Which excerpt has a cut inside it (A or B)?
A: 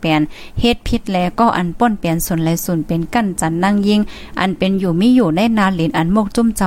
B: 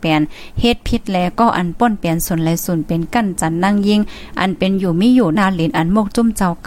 B